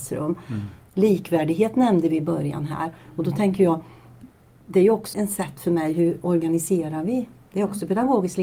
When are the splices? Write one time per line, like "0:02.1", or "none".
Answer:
0:05.1